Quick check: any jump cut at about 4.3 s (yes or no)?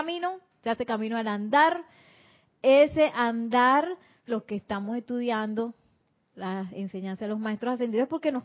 yes